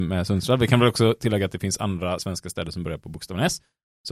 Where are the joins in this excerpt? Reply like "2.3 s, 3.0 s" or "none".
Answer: none